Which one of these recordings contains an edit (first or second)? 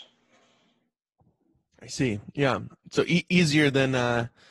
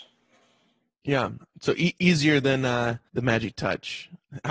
second